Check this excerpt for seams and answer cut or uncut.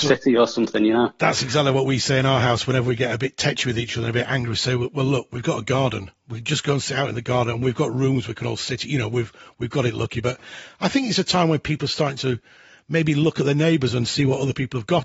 uncut